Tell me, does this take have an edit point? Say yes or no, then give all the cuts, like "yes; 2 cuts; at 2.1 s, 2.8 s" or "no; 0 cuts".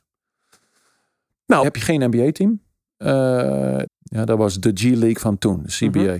yes; 2 cuts; at 1.6 s, 3.9 s